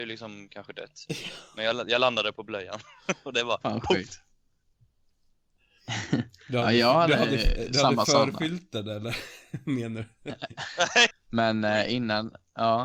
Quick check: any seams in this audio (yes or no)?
yes